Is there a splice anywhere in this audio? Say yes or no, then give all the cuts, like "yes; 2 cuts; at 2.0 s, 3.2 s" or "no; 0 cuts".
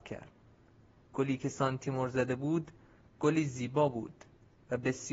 no; 0 cuts